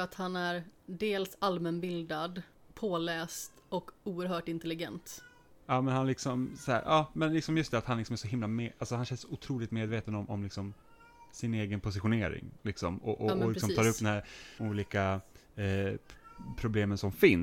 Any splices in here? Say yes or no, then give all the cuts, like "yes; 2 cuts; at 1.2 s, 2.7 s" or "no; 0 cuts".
yes; 1 cut; at 14.6 s